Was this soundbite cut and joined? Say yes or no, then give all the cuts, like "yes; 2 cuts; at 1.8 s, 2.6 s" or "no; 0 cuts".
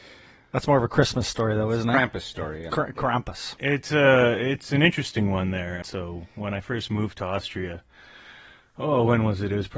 yes; 1 cut; at 5.8 s